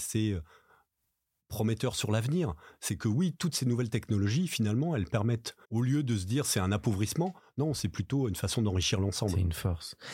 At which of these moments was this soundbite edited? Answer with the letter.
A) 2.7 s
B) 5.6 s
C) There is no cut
B